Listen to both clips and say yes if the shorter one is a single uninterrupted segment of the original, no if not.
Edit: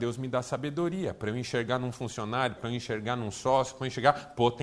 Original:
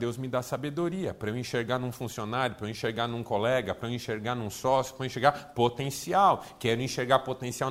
no